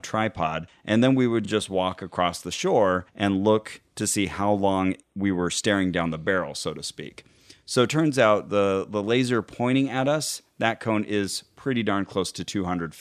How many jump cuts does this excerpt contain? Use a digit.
0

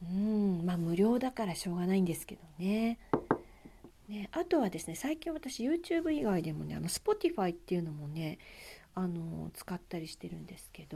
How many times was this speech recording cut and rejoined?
1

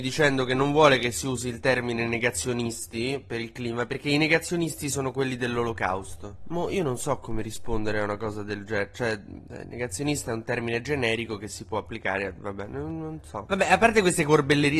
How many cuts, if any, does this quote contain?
0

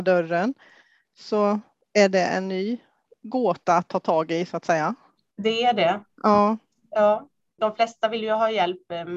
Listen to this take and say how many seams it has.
1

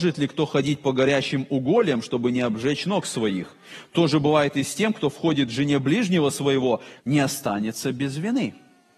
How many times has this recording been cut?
1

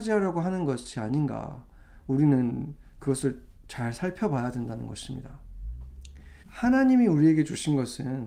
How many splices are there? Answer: 1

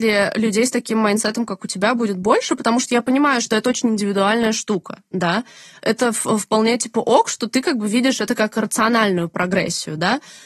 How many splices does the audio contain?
0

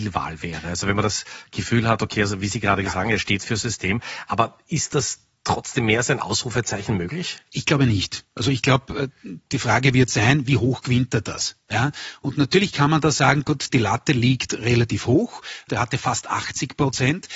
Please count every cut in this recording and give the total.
3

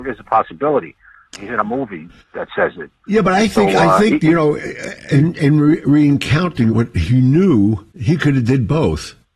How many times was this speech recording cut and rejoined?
3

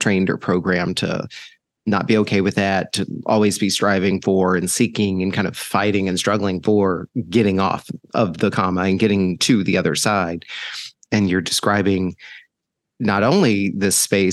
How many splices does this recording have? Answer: 0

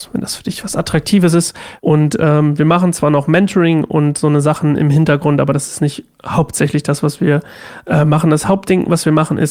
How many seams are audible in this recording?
1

